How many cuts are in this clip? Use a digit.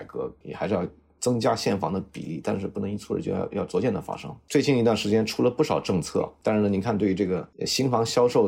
0